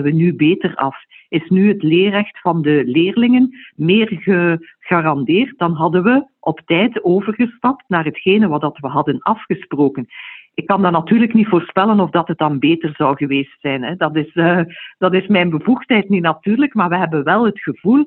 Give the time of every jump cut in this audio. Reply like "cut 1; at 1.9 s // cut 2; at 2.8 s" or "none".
none